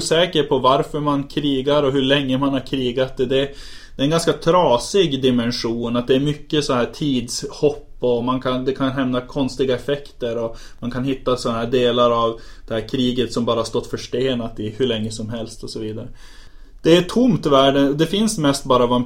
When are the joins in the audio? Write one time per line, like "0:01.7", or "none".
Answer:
none